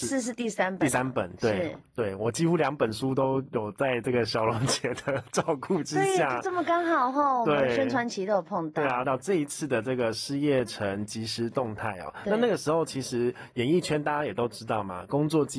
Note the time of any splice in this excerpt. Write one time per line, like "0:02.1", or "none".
0:09.0